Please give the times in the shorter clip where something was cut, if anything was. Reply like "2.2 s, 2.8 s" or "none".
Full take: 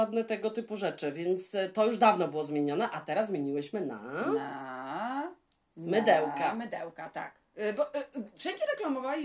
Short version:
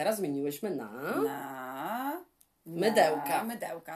none